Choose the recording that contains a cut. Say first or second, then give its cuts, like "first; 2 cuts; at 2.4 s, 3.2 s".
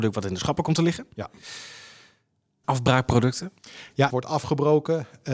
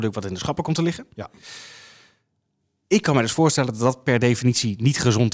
first; 2 cuts; at 2.6 s, 4.1 s